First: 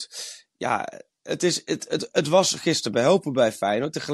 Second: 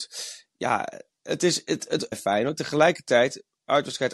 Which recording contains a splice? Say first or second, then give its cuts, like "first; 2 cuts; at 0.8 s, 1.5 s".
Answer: second; 1 cut; at 2.1 s